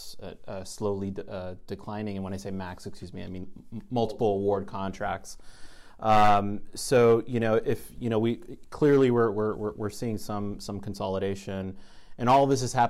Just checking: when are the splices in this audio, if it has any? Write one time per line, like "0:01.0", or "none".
none